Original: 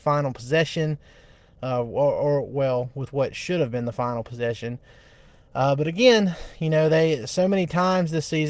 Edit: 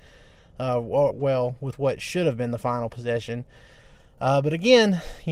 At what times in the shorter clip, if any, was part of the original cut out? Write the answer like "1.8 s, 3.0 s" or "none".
1.1 s